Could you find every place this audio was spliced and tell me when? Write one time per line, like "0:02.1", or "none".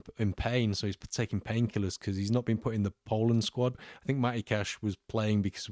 0:03.7

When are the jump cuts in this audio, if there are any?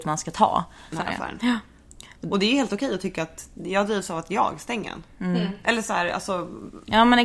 0:00.9

